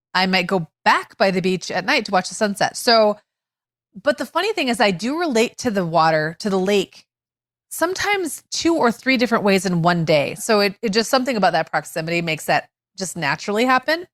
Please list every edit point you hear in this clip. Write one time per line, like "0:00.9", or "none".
0:02.7
0:10.4